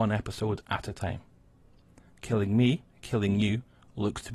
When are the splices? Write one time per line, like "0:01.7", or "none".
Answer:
none